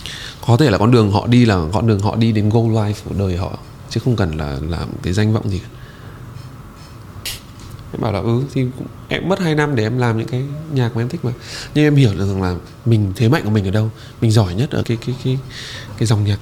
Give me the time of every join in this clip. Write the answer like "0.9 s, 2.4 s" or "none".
7.3 s, 14.8 s